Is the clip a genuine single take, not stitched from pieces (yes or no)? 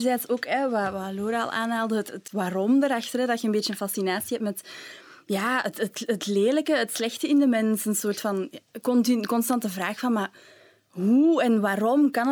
yes